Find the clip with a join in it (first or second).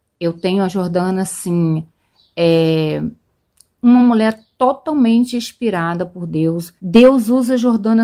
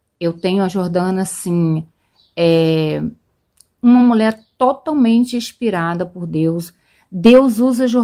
first